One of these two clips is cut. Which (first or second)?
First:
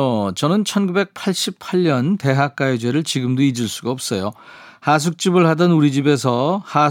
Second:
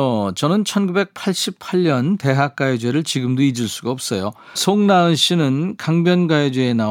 second